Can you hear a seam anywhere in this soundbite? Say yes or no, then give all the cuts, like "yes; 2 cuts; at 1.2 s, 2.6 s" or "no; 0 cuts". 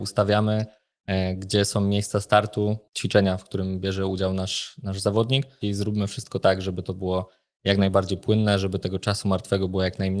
yes; 1 cut; at 5.6 s